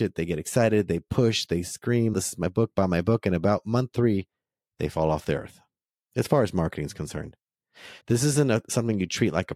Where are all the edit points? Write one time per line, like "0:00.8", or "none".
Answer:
0:02.1
0:08.0